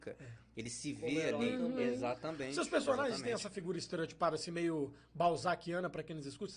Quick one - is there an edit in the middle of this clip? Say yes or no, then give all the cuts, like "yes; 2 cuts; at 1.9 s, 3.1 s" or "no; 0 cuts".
no; 0 cuts